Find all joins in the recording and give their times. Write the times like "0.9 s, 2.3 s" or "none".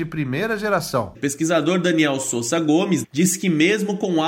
1.1 s, 3.0 s